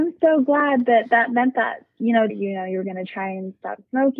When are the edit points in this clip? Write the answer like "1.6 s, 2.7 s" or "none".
2.3 s